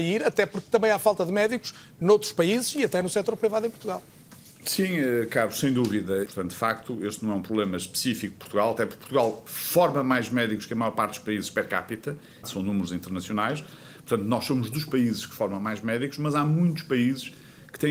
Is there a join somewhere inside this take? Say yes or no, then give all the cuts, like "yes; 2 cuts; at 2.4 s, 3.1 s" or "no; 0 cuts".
yes; 2 cuts; at 6.3 s, 12.4 s